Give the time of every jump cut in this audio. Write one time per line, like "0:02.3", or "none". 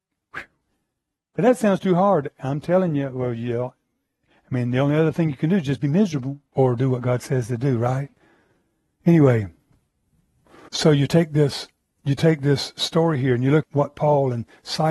0:06.5
0:10.7
0:13.6